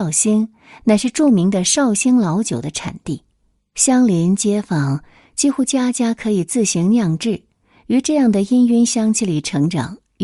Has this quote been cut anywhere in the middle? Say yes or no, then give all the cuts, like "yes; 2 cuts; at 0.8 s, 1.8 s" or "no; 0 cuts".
no; 0 cuts